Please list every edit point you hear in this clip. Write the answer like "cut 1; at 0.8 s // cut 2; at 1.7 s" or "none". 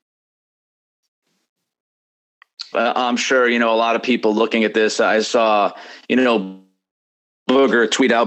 cut 1; at 2.7 s